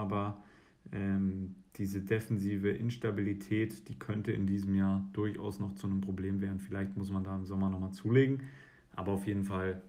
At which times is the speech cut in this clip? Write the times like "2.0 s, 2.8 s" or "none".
none